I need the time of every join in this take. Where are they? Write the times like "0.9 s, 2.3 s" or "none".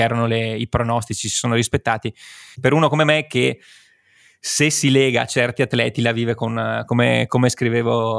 2.5 s, 6.9 s